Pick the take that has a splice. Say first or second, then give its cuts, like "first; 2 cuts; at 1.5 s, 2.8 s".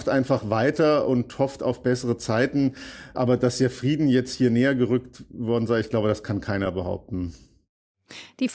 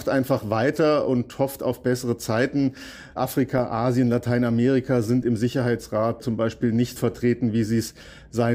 second; 2 cuts; at 3.1 s, 7.0 s